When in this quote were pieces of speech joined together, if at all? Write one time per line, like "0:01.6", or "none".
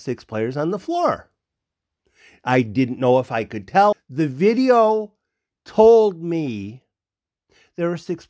0:03.9